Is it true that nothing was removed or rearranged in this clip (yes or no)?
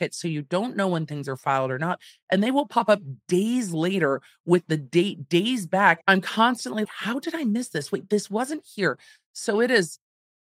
no